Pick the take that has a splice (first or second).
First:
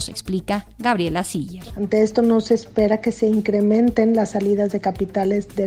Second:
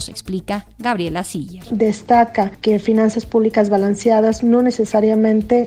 first